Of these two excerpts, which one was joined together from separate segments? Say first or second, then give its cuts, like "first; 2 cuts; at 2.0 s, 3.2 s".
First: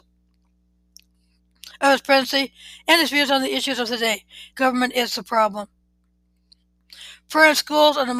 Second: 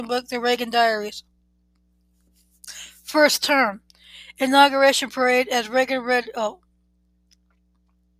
first; 1 cut; at 4.5 s